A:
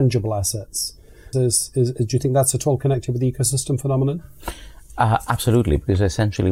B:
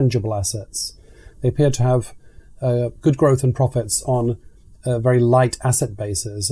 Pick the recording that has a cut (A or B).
A